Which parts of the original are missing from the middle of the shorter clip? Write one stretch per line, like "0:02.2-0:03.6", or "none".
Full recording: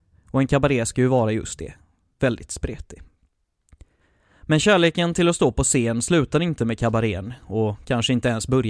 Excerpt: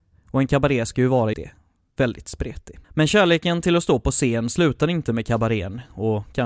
0:01.3-0:01.6
0:03.1-0:04.4